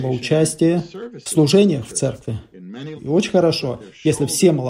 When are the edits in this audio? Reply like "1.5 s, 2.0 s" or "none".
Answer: 3.0 s